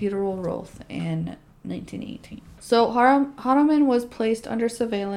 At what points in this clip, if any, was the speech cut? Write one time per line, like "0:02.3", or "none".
0:02.6